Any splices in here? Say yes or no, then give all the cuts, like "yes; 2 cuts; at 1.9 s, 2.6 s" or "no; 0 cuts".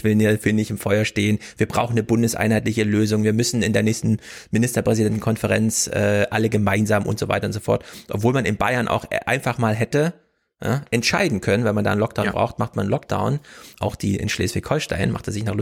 yes; 1 cut; at 13.7 s